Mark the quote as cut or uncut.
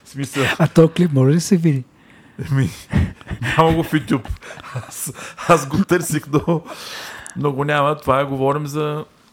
uncut